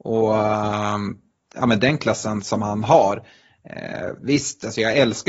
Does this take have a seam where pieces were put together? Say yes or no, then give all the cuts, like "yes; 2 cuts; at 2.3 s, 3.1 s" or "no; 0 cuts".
no; 0 cuts